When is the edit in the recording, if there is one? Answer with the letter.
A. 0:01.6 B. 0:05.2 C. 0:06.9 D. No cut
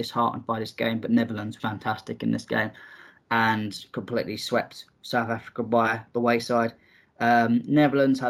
A